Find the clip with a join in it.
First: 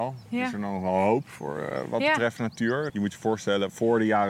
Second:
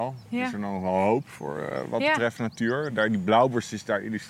first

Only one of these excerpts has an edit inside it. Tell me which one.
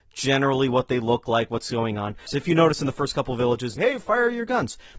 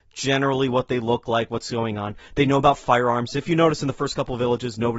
first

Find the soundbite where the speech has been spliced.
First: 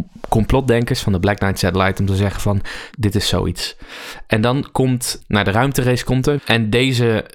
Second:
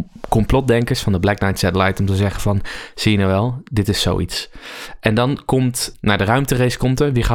first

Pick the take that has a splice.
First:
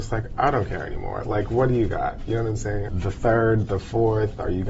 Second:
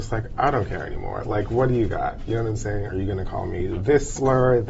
first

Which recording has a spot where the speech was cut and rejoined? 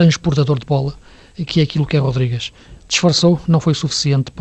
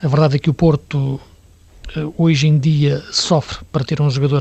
first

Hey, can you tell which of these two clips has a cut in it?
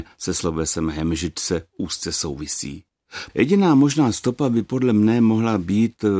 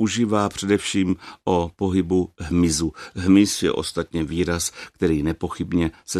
first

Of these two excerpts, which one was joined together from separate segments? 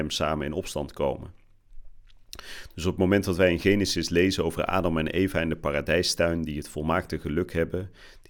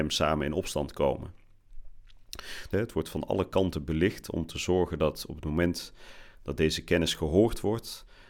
second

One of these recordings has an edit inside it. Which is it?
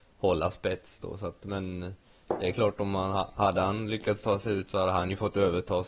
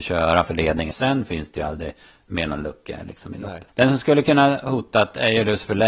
second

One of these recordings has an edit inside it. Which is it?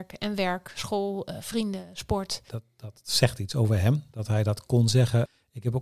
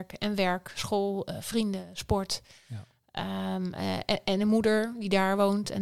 first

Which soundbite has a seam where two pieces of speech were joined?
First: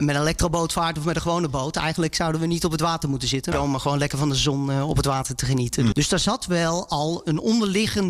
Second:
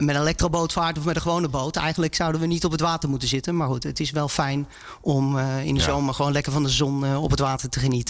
first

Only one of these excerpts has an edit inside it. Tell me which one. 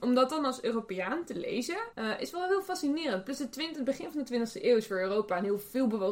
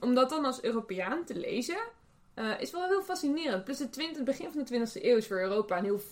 first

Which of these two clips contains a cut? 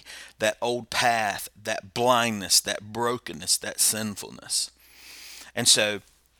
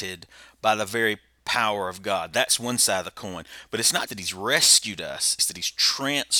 second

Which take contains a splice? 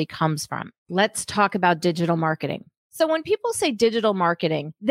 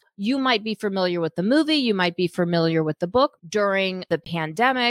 second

